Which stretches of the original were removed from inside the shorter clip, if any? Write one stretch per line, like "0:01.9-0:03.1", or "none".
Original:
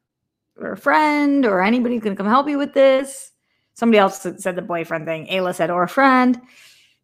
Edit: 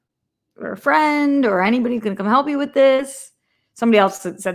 none